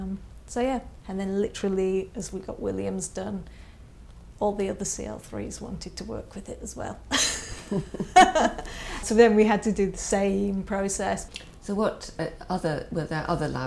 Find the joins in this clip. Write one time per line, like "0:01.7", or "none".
0:01.0
0:09.0
0:11.3